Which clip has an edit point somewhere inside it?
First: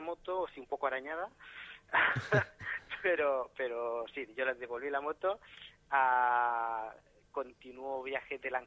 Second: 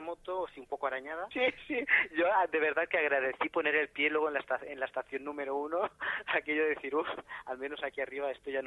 second; 1 cut; at 1.3 s

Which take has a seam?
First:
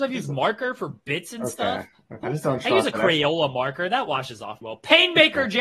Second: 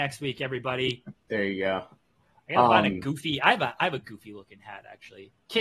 first; 2 cuts; at 2.2 s, 4.6 s

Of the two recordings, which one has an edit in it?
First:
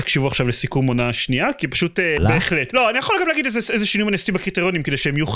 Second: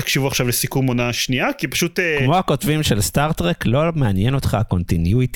first; 1 cut; at 2.2 s

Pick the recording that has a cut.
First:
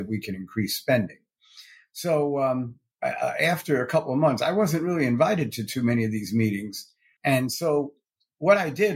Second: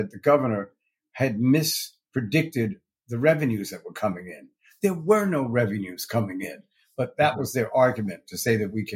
first; 2 cuts; at 2.9 s, 7.2 s

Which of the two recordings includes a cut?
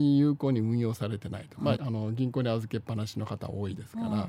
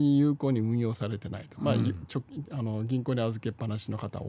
first; 1 cut; at 1.7 s

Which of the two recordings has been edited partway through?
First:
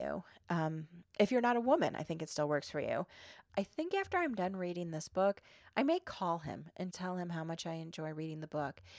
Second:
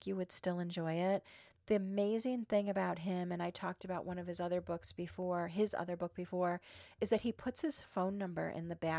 first; 2 cuts; at 3.5 s, 6.9 s

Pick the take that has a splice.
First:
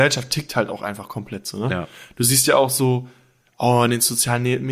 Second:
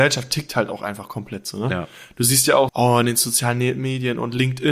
second; 1 cut; at 2.7 s

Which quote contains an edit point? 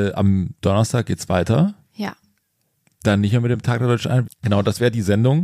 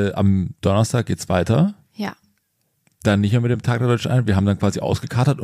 first; 1 cut; at 4.2 s

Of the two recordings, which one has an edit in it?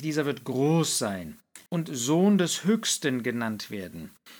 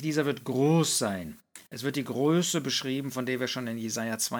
first; 1 cut; at 1.7 s

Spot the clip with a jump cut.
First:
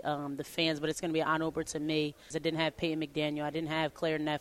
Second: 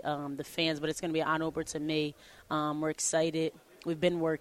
first; 1 cut; at 2.3 s

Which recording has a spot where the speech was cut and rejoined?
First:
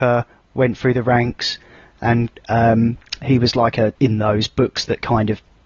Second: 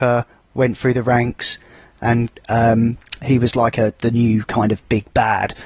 first; 1 cut; at 3.9 s

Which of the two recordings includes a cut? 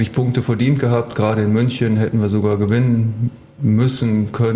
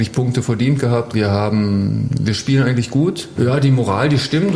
second; 2 cuts; at 1.1 s, 3.4 s

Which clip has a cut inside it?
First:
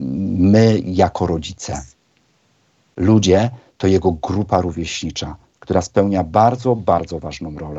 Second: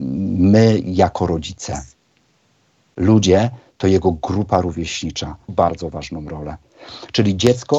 second; 1 cut; at 5.5 s

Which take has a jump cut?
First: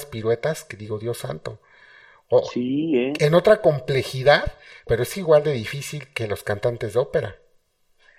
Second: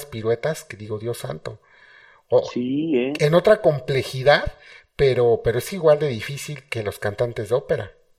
first; 1 cut; at 4.9 s

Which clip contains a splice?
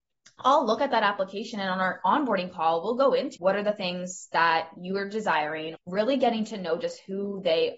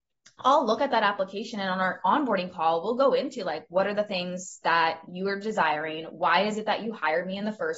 first; 2 cuts; at 3.4 s, 5.8 s

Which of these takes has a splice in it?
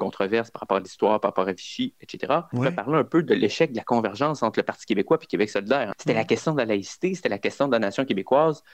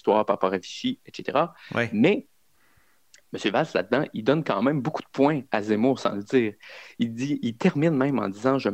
first; 2 cuts; at 2.5 s, 5.9 s

